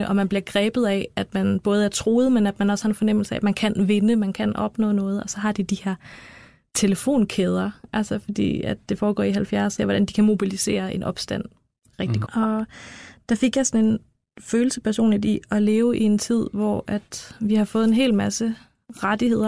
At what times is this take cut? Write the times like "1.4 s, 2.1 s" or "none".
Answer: 9.8 s, 12.3 s